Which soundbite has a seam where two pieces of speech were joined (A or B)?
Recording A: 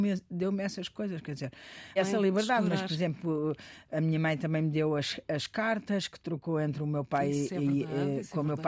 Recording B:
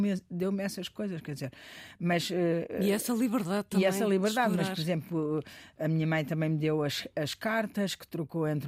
A